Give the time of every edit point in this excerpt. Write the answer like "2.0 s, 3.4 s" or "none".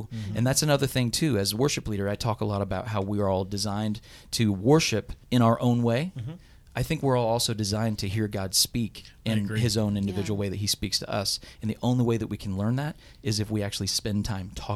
5.2 s